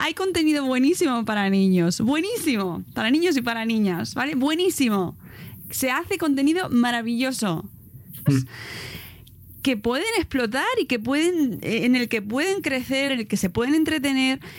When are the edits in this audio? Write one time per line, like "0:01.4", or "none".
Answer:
0:08.3
0:13.1